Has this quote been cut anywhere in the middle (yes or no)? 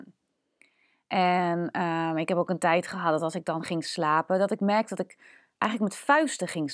no